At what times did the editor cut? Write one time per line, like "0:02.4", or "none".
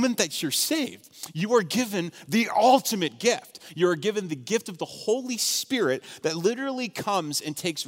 none

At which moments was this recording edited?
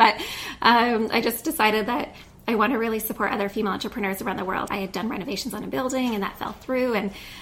0:04.7

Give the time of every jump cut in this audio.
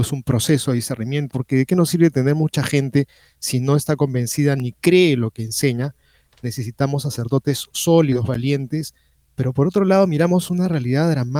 0:01.3

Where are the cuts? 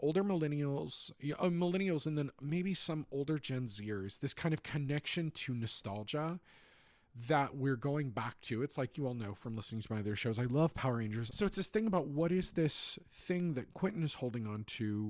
0:11.3

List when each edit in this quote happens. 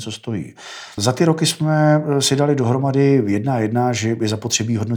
0:01.0

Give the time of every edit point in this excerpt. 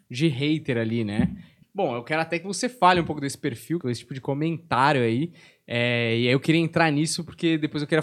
0:01.6
0:03.8

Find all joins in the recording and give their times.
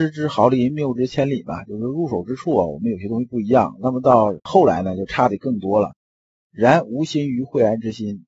0:06.4

